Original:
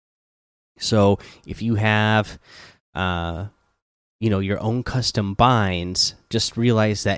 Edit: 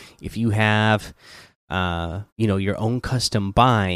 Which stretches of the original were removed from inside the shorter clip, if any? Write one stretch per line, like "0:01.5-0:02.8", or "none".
0:03.5-0:04.1